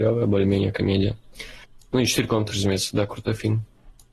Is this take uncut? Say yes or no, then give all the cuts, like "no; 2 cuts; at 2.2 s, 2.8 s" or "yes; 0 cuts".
yes; 0 cuts